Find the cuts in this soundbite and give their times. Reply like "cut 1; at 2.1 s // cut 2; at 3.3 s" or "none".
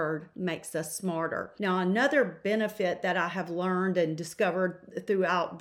none